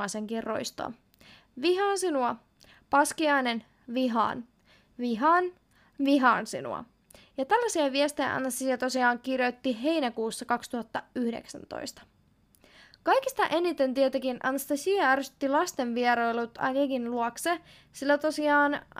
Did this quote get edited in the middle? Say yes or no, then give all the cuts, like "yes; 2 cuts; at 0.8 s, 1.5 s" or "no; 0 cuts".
no; 0 cuts